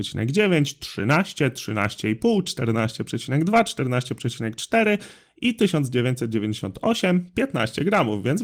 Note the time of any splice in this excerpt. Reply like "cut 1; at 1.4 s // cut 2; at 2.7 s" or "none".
none